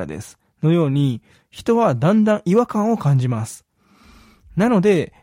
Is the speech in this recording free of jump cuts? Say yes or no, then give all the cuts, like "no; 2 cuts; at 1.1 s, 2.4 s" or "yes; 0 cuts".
no; 1 cut; at 1.4 s